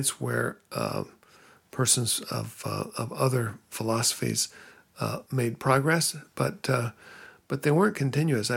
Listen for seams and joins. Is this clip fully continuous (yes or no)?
yes